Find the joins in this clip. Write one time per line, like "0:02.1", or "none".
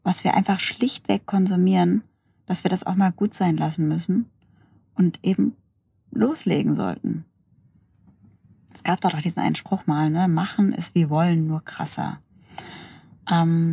none